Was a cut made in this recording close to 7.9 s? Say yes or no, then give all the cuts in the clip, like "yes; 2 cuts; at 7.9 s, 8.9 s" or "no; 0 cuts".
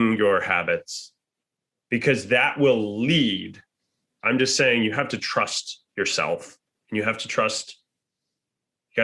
no; 1 cut; at 4.2 s